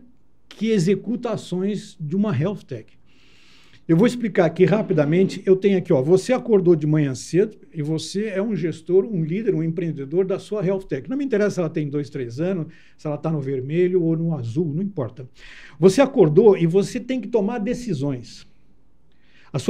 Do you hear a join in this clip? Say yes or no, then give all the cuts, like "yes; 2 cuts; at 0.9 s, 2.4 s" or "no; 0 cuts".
no; 0 cuts